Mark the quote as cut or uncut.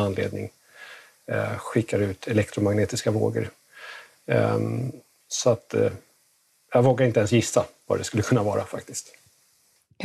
uncut